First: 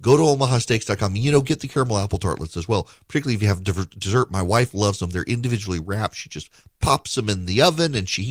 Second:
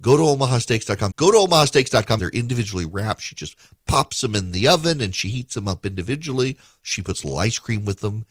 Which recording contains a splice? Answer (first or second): second